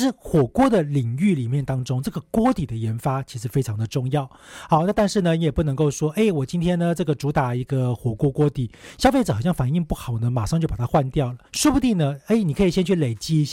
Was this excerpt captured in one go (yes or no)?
no